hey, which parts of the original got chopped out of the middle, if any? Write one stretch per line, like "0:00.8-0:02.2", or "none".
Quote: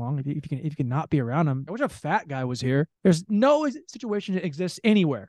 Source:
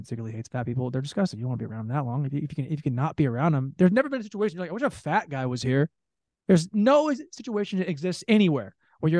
0:03.7-0:04.7
0:06.0-0:06.4